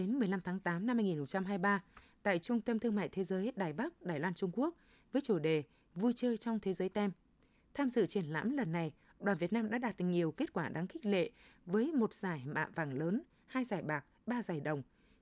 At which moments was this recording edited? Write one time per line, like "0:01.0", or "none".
none